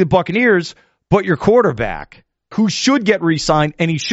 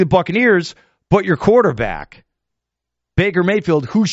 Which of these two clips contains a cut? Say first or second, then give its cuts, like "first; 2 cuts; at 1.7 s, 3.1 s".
first; 1 cut; at 2.5 s